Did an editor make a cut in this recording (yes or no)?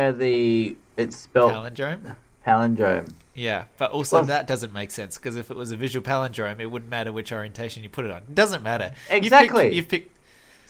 no